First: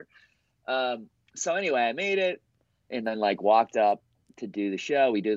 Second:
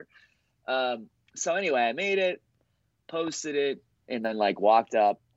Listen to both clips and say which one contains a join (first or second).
first